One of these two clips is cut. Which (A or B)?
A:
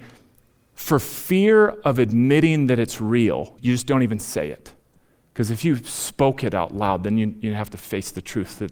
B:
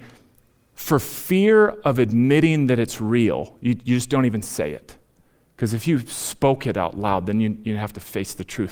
A